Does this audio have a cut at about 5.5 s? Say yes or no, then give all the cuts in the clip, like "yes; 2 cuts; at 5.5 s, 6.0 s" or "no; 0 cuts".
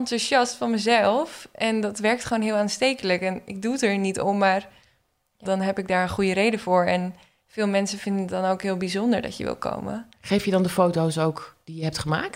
yes; 1 cut; at 5.5 s